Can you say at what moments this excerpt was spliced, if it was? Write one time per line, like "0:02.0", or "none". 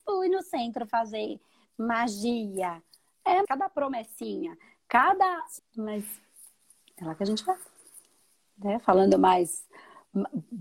0:03.4
0:05.6